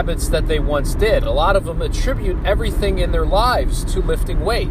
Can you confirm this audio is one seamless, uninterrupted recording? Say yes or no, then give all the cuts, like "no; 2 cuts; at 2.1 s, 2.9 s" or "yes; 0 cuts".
yes; 0 cuts